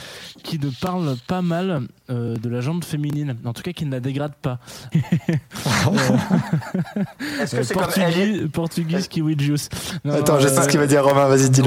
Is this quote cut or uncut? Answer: cut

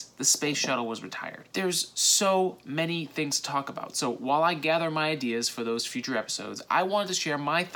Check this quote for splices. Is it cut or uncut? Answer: cut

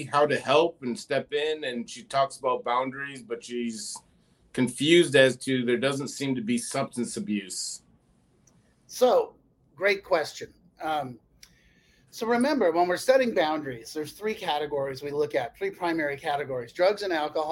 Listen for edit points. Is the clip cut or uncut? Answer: uncut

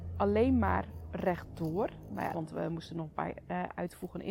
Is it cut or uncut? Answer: cut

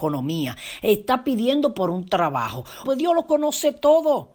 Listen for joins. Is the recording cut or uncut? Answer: cut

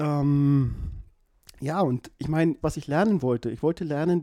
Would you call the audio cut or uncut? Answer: cut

